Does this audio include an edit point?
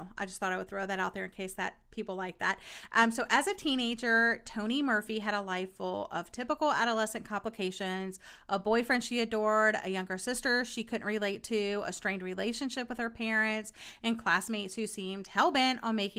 no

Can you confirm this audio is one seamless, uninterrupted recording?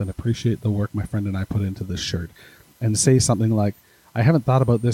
yes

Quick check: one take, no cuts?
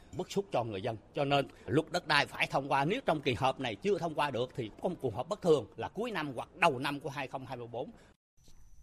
yes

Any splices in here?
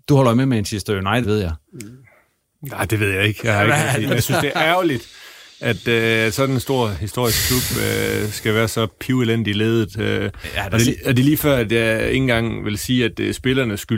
yes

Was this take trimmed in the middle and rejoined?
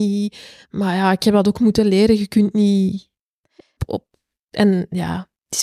yes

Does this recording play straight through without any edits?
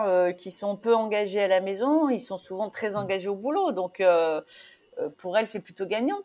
no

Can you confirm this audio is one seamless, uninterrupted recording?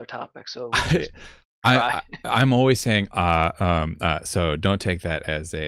no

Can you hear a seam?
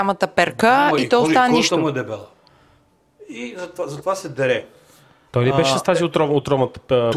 no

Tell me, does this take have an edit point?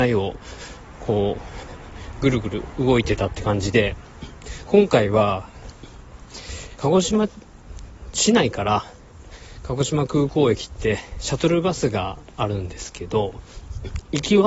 yes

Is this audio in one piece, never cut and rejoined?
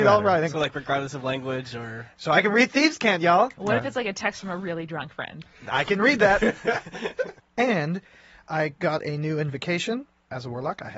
no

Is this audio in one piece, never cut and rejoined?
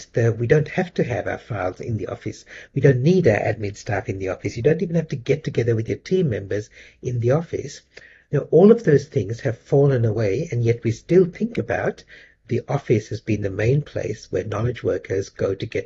yes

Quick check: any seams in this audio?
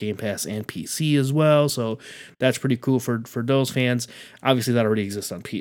no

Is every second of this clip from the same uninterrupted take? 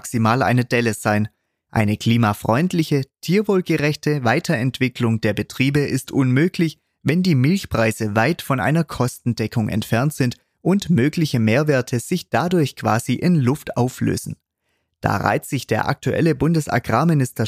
no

